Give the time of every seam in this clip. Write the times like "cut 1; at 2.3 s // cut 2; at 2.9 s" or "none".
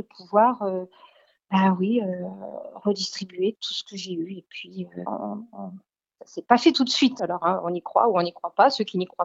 cut 1; at 3.5 s // cut 2; at 5.1 s // cut 3; at 7.2 s